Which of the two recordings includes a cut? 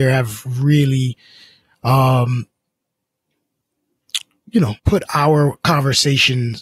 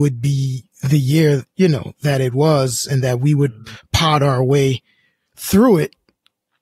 first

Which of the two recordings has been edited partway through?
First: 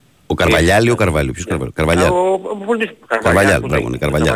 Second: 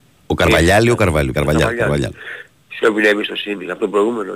second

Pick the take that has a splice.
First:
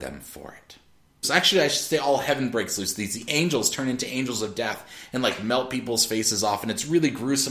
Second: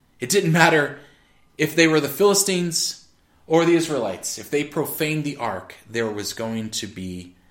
first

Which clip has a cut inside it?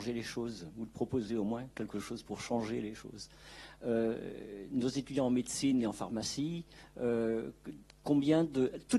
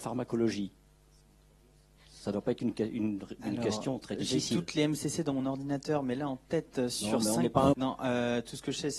second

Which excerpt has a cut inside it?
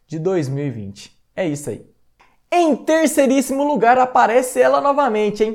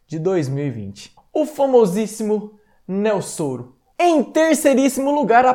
second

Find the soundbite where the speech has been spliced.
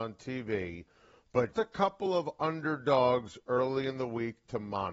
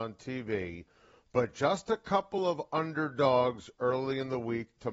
first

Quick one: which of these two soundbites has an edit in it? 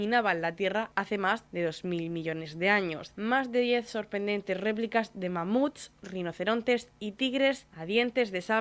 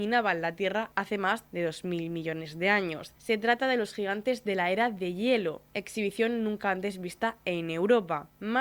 first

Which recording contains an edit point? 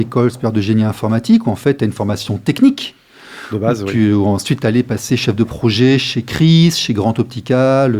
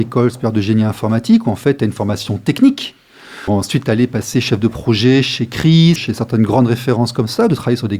second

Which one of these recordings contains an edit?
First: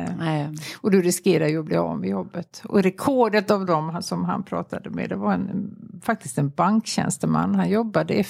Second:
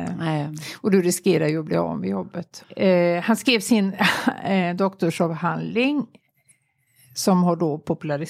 second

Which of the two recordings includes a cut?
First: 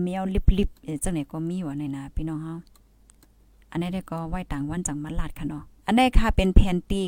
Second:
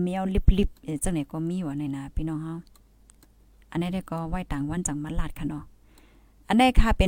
first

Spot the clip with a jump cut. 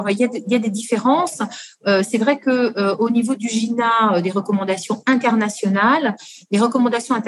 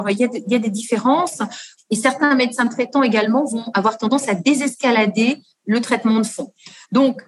second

